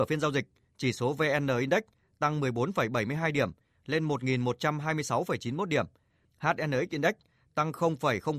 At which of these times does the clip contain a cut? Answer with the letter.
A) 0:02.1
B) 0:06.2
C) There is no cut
C